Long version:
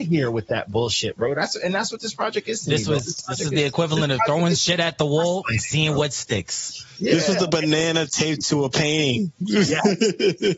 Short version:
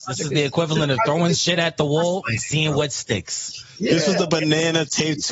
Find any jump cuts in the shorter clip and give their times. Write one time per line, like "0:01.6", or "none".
none